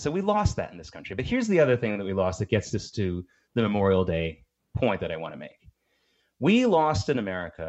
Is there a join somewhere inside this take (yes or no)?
no